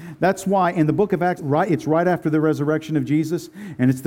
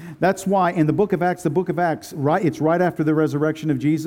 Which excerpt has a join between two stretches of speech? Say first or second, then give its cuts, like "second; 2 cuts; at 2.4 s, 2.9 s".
first; 1 cut; at 1.4 s